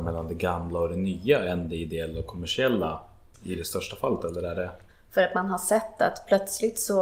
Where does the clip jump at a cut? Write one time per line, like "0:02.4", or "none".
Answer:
0:04.9